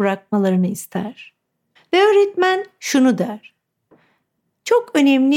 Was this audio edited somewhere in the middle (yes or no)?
yes